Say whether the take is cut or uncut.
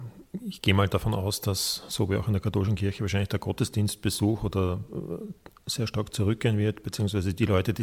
uncut